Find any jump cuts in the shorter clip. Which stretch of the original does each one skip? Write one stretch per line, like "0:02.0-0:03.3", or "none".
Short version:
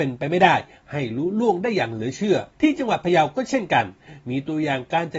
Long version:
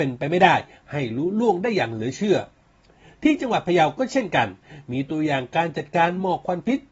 0:02.5-0:03.1